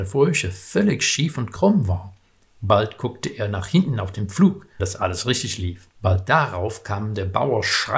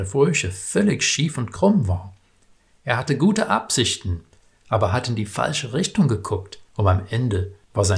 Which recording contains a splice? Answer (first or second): first